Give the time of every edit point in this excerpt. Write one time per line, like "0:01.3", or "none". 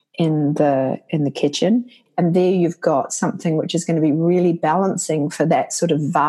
0:02.1